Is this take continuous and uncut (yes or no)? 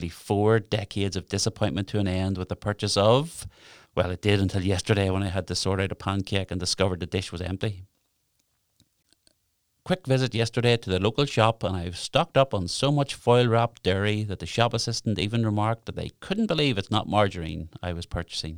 no